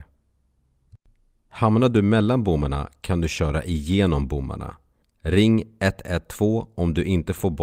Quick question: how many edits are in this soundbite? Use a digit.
1